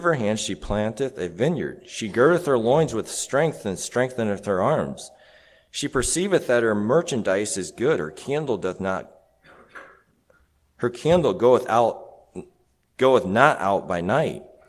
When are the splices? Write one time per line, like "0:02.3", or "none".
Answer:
none